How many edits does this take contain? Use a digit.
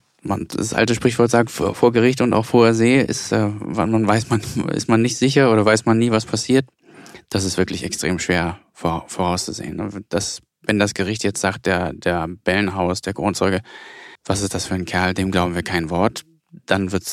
1